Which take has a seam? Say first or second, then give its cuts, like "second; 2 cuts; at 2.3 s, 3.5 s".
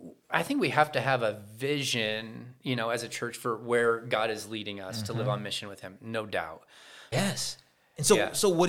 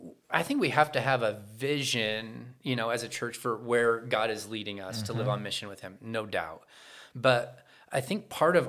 first; 1 cut; at 7.1 s